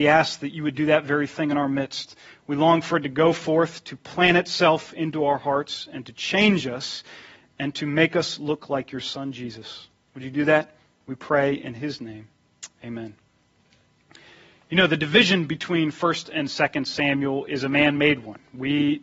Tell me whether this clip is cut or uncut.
uncut